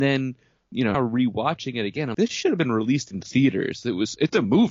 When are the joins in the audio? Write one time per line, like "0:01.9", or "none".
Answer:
0:00.9
0:02.1